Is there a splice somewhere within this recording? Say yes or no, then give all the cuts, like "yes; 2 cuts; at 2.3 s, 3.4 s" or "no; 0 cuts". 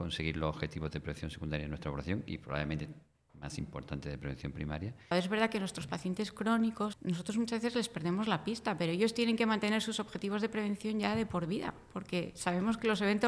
yes; 2 cuts; at 5.1 s, 6.9 s